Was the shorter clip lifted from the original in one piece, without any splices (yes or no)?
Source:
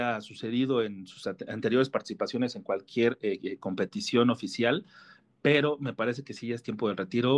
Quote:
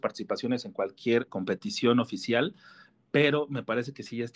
no